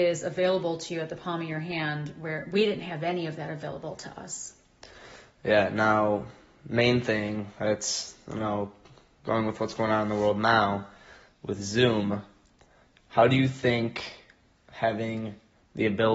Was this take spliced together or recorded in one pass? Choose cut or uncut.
uncut